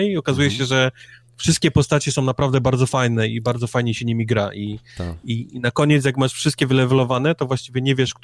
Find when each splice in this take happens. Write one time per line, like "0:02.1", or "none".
none